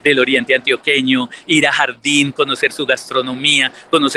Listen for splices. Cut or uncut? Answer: uncut